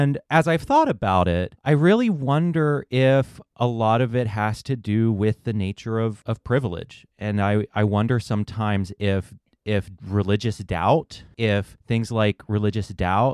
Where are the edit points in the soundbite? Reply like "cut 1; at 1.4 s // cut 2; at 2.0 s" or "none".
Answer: none